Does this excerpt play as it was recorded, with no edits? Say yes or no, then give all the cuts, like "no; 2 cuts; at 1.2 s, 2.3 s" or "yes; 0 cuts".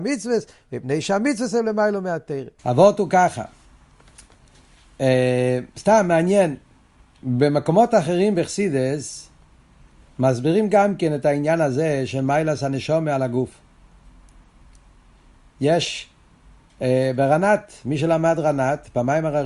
no; 1 cut; at 2.6 s